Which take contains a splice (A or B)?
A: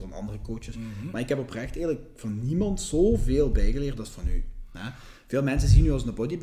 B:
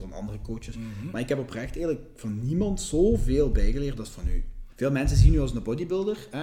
B